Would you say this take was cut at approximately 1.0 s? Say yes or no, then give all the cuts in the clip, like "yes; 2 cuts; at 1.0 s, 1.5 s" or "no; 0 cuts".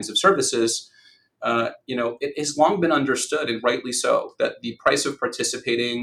no; 0 cuts